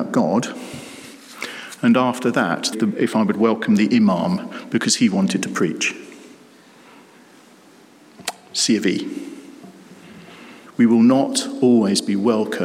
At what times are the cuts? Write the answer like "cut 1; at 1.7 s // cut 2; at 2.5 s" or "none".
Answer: cut 1; at 2.7 s // cut 2; at 10.7 s